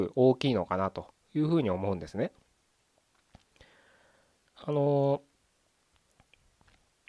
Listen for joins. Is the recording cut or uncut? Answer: uncut